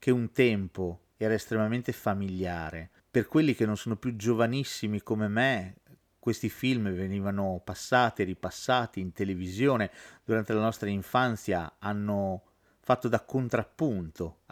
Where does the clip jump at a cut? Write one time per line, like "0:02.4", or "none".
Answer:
none